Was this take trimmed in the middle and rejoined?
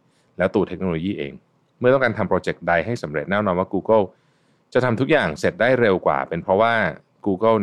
no; 0 cuts

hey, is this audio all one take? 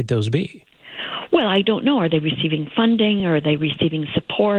yes; 0 cuts

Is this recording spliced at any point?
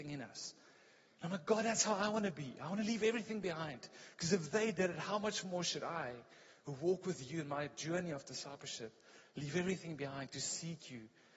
no; 0 cuts

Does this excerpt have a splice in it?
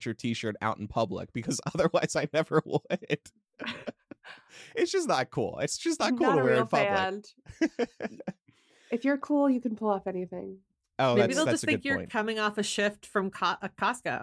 no; 0 cuts

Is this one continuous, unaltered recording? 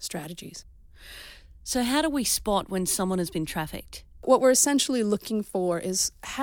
yes; 0 cuts

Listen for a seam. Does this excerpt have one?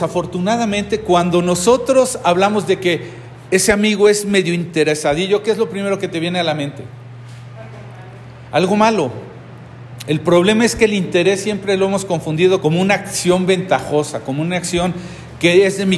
yes; 1 cut; at 12.6 s

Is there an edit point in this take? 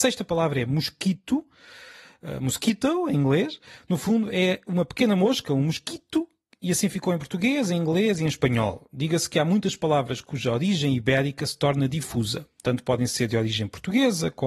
no; 0 cuts

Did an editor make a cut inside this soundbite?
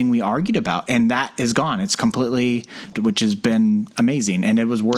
yes; 1 cut; at 2.9 s

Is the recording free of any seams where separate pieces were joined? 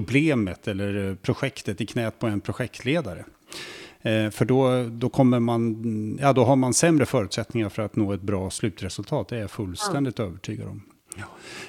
yes; 0 cuts

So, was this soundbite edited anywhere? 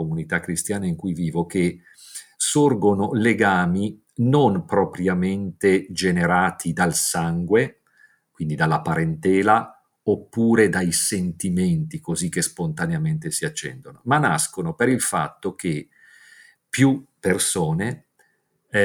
no; 0 cuts

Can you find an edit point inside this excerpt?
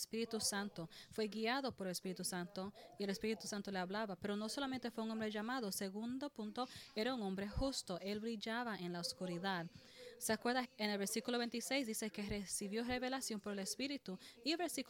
yes; 1 cut; at 10.6 s

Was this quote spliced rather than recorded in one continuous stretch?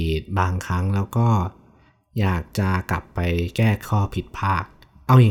yes; 1 cut; at 3.8 s

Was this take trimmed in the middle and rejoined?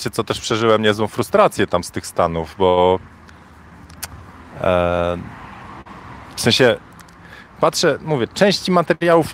no; 0 cuts

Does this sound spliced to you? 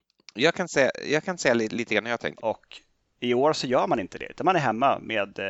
yes; 1 cut; at 2.4 s

